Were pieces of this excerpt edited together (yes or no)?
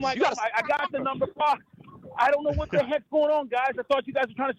no